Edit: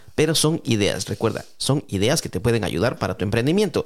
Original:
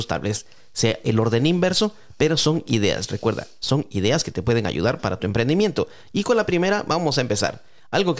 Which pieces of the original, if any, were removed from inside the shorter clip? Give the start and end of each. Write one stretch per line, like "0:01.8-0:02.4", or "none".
none